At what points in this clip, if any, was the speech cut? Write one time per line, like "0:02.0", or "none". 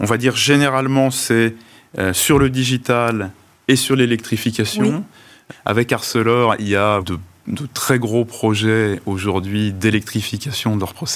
0:05.5
0:07.0